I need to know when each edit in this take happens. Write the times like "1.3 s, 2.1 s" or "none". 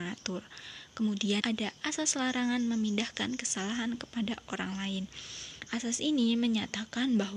1.4 s, 5.7 s